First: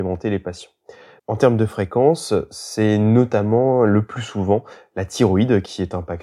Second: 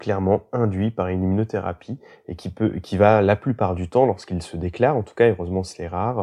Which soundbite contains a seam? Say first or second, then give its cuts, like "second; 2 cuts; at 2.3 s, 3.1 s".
first; 1 cut; at 1.2 s